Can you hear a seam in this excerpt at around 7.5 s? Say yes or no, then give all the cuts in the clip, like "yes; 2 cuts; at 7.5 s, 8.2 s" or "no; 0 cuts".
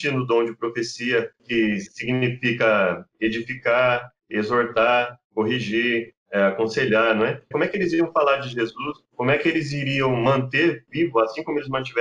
yes; 1 cut; at 7.5 s